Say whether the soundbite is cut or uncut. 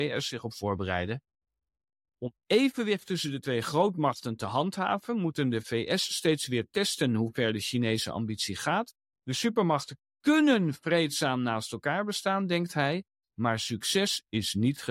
uncut